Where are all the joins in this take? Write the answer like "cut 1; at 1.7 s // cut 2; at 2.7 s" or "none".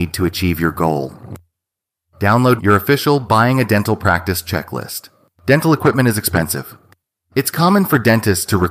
cut 1; at 2.6 s // cut 2; at 5.3 s